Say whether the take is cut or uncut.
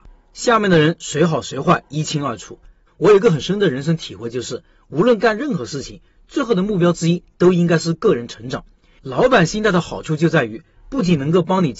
cut